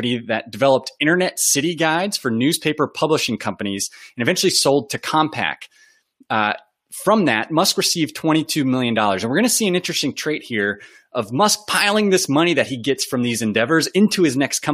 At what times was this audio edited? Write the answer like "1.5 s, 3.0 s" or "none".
none